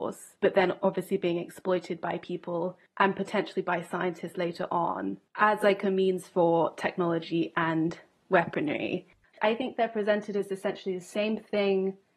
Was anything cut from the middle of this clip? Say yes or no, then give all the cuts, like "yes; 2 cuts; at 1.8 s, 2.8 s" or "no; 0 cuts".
yes; 1 cut; at 9.3 s